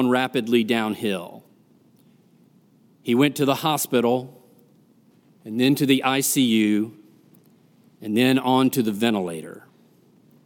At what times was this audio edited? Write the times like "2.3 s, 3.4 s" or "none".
none